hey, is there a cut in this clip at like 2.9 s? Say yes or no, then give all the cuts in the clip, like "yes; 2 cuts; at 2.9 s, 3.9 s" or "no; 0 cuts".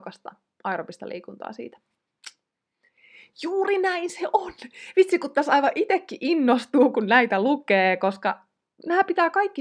no; 0 cuts